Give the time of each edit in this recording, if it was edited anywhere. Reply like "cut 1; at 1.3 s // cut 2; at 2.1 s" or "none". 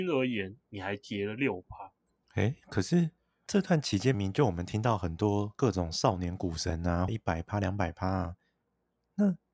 cut 1; at 4.1 s // cut 2; at 7.1 s